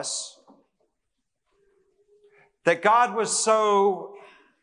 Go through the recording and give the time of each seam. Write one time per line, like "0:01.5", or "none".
none